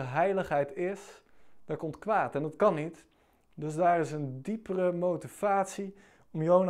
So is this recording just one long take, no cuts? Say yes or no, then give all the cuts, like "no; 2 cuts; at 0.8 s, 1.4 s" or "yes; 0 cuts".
yes; 0 cuts